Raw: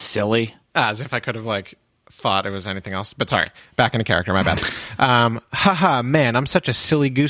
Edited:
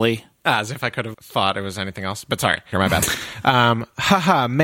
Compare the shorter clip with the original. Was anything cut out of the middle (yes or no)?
yes